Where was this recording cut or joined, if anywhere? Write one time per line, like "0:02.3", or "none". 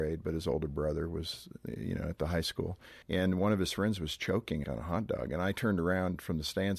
0:03.0
0:04.6